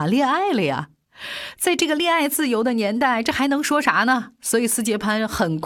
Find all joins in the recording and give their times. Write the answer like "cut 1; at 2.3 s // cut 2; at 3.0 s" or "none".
none